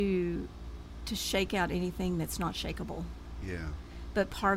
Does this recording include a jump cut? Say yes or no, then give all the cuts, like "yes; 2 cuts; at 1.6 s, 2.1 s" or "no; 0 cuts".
no; 0 cuts